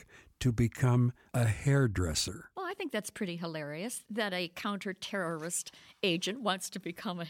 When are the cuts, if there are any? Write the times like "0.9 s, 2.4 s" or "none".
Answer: none